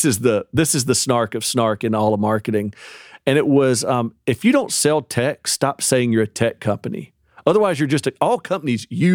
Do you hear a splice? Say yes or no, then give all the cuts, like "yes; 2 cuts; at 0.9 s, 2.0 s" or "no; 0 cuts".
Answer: yes; 1 cut; at 4.2 s